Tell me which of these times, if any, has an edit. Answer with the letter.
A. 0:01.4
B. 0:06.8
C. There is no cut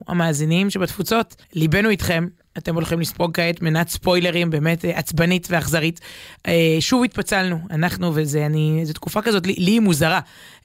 A